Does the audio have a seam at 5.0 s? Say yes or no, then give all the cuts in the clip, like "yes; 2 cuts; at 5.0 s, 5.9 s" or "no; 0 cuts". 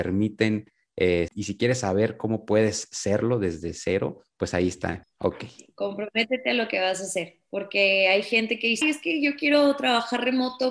yes; 3 cuts; at 1.3 s, 5.0 s, 8.8 s